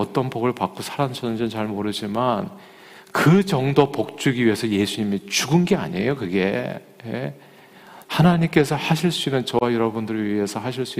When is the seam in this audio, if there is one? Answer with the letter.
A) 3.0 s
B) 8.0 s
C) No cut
B